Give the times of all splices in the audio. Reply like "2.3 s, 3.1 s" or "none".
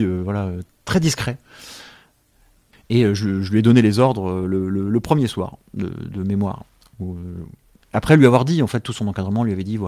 2.7 s